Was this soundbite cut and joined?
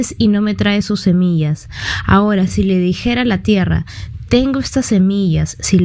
no; 0 cuts

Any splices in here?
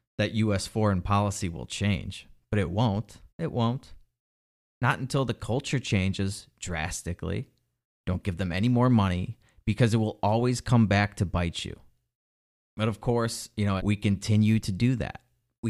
yes; 3 cuts; at 3.3 s, 8.0 s, 13.8 s

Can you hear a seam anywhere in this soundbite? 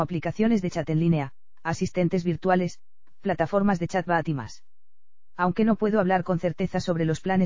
no; 0 cuts

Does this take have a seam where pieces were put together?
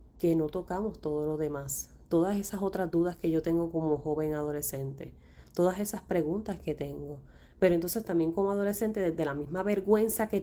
no; 0 cuts

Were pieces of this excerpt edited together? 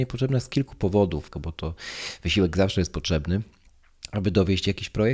yes; 1 cut; at 1.3 s

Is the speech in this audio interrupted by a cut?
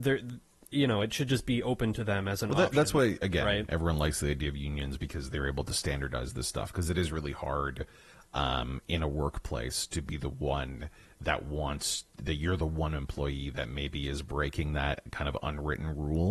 no; 0 cuts

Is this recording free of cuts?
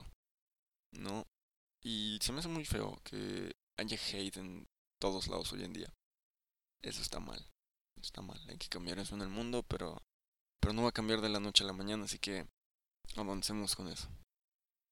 yes; 0 cuts

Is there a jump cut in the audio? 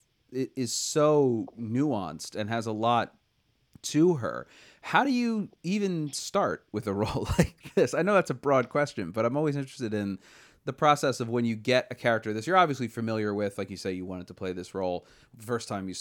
no; 0 cuts

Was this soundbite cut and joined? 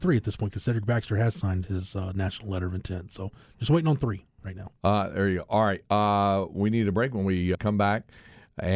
yes; 2 cuts; at 4.8 s, 7.5 s

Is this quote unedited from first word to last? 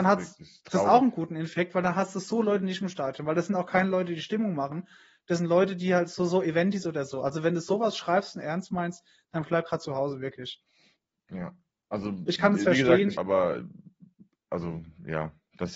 no; 1 cut; at 13.1 s

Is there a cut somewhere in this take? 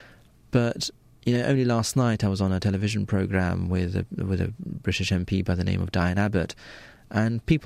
no; 0 cuts

